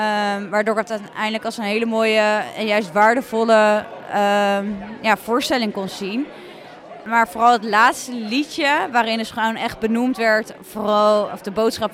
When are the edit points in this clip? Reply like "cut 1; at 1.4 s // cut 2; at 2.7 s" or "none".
none